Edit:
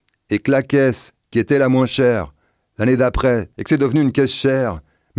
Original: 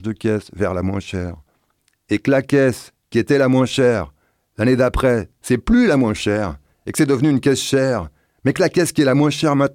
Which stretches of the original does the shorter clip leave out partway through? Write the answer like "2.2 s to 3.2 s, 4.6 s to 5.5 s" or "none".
5.3 s to 6.8 s

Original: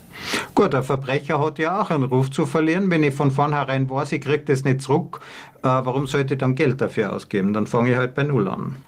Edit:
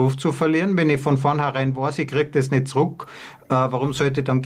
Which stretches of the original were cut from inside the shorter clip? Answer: none

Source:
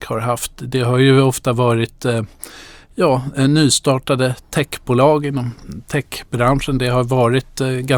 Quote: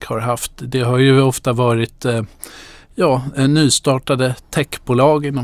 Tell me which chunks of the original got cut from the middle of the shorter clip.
none

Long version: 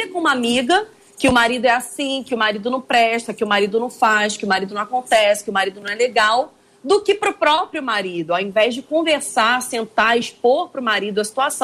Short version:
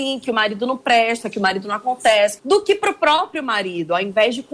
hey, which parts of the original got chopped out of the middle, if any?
3.4 s to 4.4 s, 5.4 s to 6.8 s

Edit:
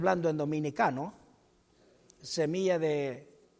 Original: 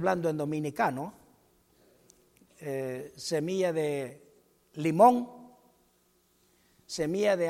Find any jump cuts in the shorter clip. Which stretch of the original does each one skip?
2.2 s to 3.1 s

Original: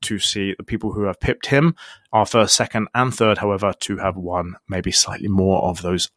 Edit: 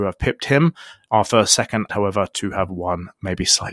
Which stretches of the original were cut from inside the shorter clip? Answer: 2.9 s to 3.4 s

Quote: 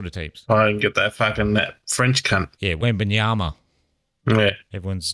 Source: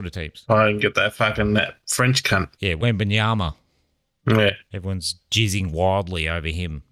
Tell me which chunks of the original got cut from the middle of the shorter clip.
none

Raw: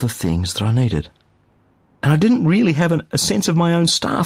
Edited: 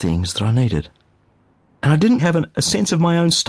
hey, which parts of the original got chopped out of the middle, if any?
2.4 s to 2.7 s

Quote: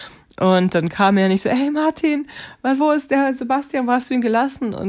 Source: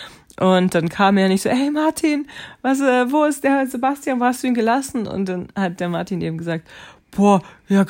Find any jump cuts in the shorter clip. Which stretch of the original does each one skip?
2.8 s to 3.1 s

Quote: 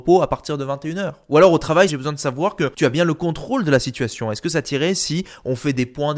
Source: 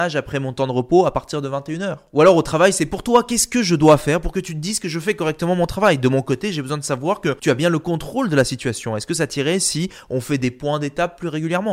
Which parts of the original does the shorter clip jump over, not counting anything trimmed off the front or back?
2.7 s to 6.5 s

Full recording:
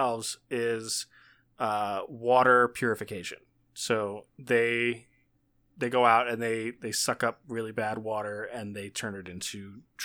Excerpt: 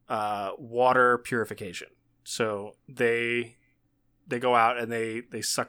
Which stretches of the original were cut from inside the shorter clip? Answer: none

